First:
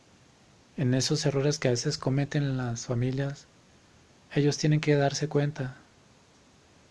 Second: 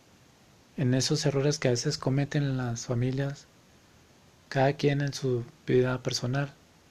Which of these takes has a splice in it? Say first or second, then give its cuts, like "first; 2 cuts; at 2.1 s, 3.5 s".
first; 1 cut; at 4.3 s